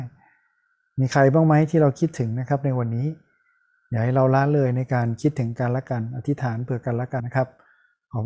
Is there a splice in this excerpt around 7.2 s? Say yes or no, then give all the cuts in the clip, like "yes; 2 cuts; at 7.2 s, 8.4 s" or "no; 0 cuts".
yes; 1 cut; at 7.2 s